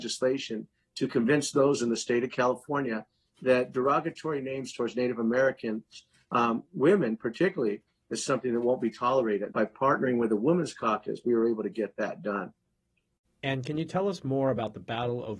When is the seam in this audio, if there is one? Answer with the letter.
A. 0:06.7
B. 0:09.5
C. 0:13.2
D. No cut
B